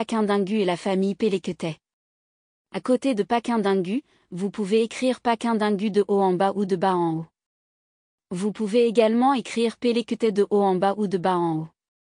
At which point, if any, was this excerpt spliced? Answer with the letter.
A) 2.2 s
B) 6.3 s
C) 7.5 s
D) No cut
D